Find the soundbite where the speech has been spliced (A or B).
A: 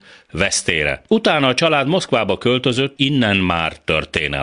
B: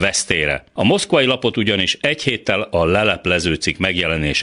A